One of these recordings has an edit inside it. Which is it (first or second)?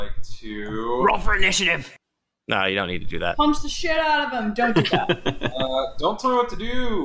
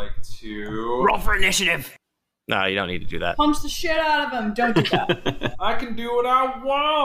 second